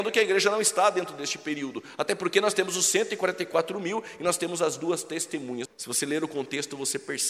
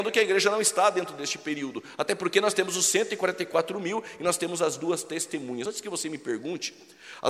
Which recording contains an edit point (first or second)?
first